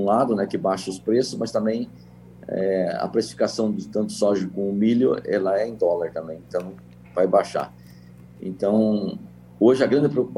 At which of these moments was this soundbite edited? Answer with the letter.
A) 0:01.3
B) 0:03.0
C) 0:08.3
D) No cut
D